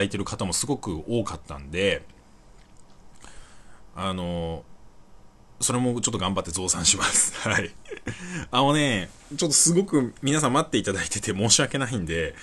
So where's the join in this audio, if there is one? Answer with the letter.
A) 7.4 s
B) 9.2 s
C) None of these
C